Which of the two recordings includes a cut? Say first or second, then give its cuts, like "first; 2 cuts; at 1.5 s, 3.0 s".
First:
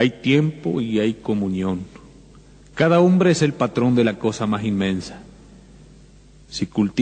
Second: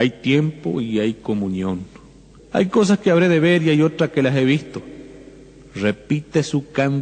second; 1 cut; at 2.4 s